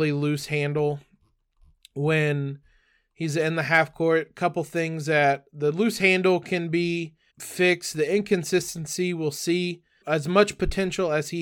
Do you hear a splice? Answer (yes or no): yes